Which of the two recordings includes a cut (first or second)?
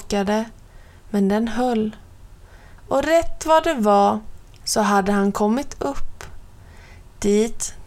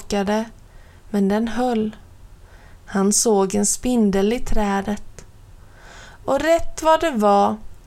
first